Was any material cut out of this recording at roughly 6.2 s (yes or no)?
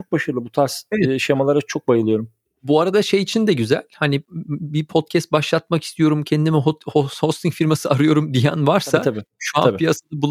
no